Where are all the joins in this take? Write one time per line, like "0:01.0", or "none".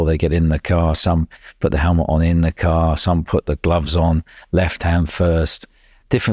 none

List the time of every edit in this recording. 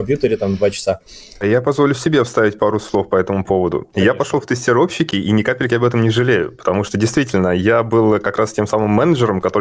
0:01.4

